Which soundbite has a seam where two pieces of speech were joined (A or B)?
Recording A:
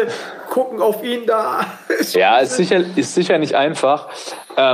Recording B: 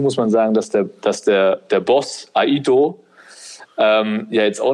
A